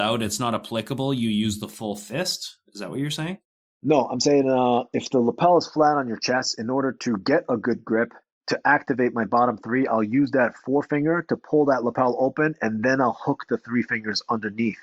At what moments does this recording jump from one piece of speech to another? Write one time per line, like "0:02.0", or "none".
none